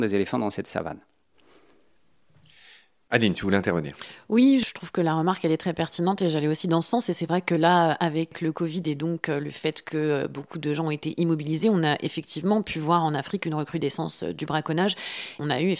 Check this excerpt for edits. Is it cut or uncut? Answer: uncut